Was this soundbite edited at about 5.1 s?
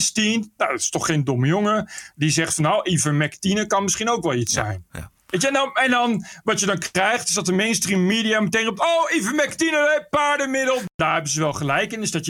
no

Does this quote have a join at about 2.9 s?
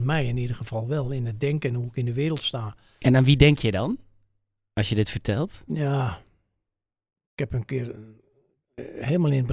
no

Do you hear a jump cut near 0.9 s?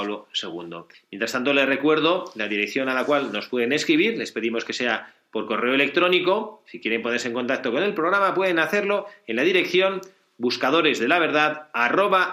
yes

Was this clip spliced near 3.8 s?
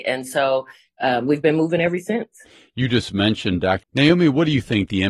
yes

